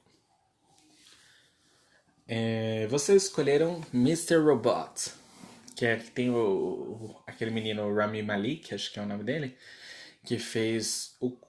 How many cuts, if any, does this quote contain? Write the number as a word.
zero